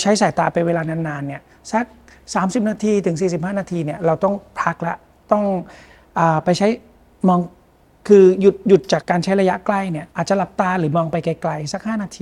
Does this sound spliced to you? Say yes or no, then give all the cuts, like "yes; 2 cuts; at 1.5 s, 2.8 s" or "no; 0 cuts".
yes; 2 cuts; at 9.0 s, 10.1 s